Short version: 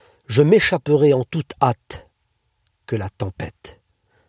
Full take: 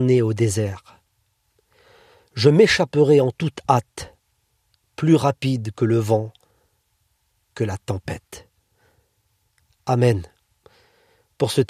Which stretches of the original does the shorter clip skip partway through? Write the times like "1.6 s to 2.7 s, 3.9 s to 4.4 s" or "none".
4.8 s to 7.4 s